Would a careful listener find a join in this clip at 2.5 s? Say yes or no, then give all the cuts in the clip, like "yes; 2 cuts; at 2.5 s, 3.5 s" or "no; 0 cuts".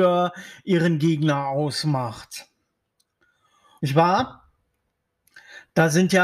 no; 1 cut; at 3.8 s